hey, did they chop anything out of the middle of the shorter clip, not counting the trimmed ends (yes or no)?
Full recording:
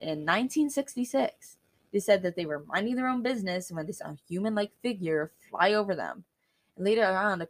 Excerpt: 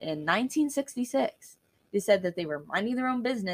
no